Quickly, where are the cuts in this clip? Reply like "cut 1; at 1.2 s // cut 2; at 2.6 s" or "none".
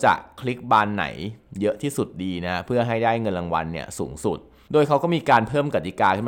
none